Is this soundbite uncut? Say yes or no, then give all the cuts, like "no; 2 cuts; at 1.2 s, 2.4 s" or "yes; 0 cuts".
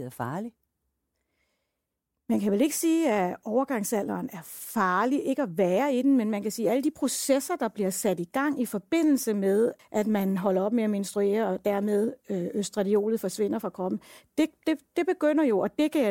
no; 1 cut; at 9.8 s